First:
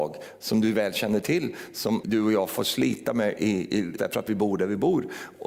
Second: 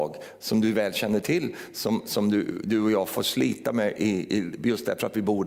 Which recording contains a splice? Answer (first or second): first